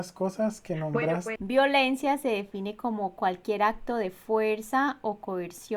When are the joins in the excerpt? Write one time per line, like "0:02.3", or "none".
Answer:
0:01.4